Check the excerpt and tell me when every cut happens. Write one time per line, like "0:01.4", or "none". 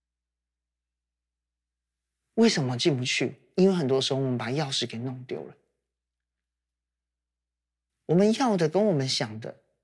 0:07.9